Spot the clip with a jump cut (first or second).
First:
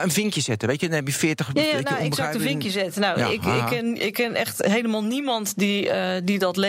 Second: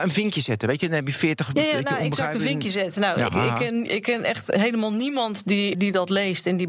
second